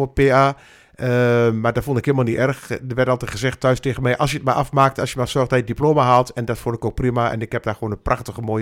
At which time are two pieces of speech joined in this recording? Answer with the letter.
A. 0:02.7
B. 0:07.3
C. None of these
C